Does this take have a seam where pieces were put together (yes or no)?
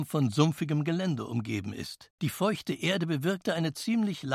no